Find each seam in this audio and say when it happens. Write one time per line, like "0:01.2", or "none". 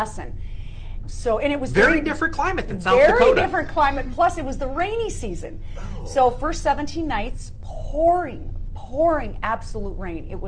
0:01.0

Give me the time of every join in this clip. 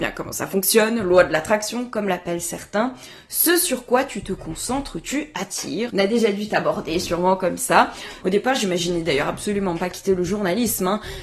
0:05.9
0:08.2

